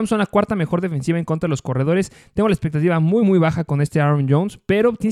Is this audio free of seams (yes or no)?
yes